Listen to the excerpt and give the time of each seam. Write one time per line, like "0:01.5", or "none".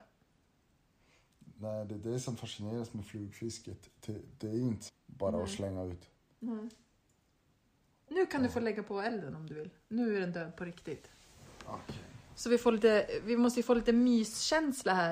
0:04.9